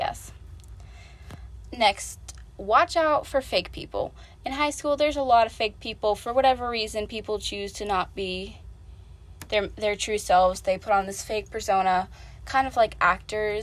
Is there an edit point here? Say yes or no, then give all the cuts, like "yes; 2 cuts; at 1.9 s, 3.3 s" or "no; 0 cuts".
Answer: no; 0 cuts